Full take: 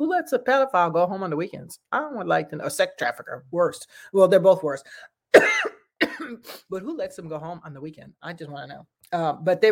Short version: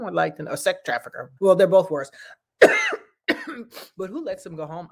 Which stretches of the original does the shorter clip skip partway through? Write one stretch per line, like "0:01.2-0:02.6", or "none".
0:03.5-0:04.1